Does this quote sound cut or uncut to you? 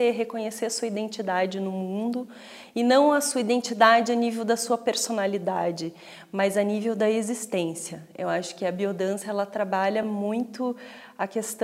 uncut